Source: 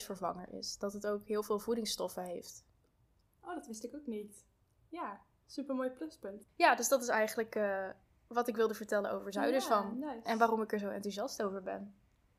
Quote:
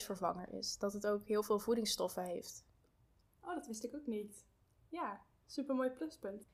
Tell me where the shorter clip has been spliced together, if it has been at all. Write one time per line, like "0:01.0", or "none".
none